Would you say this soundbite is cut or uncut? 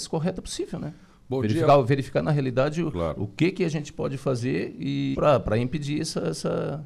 cut